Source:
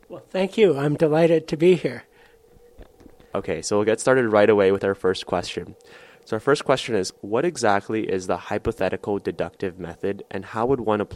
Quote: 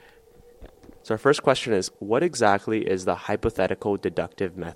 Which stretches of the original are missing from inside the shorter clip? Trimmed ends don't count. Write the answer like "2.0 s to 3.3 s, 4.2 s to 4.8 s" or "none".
3.2 s to 6.2 s